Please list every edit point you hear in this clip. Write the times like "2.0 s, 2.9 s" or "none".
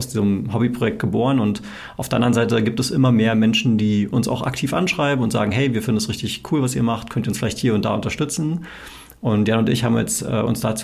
none